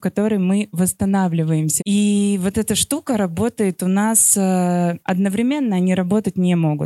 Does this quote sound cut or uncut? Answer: cut